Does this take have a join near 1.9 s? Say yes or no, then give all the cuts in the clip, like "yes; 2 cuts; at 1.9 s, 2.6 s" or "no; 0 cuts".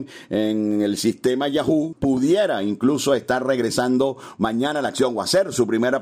yes; 1 cut; at 1.9 s